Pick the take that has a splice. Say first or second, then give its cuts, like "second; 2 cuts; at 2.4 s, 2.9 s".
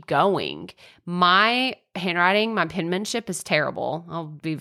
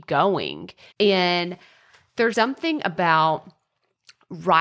second; 2 cuts; at 0.9 s, 2.3 s